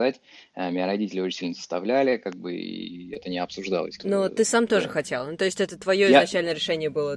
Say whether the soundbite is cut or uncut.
uncut